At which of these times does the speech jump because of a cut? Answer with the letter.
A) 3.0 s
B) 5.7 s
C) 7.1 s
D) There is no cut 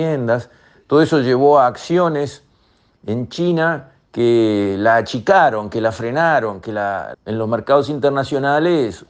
C